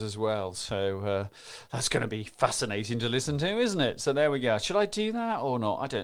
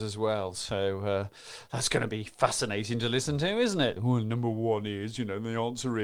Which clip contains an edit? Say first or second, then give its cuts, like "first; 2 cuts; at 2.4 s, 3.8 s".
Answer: second; 1 cut; at 4.0 s